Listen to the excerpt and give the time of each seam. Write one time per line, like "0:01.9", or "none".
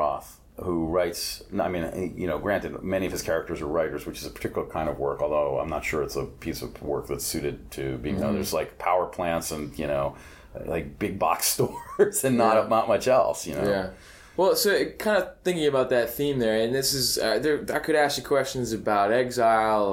0:08.2